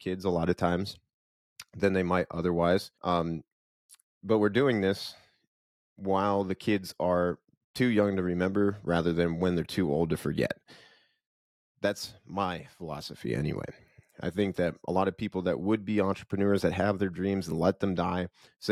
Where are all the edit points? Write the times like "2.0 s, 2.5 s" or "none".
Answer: 2.9 s